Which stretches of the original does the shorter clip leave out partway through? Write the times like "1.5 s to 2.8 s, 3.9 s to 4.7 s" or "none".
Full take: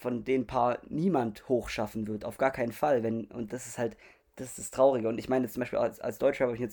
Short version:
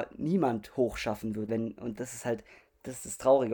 2.2 s to 3.0 s